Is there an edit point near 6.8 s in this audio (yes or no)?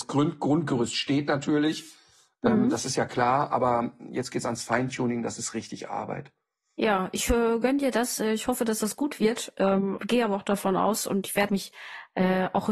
no